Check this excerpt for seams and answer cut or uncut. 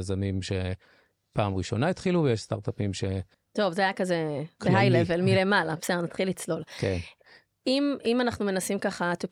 cut